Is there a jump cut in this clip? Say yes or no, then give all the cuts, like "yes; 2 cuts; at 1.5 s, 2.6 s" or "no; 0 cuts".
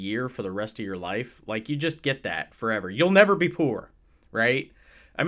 no; 0 cuts